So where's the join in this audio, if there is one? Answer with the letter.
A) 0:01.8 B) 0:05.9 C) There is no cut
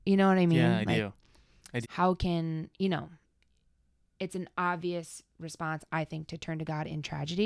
A